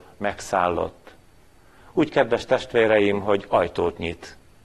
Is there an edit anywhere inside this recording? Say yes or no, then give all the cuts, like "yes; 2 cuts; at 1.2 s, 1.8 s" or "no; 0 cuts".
no; 0 cuts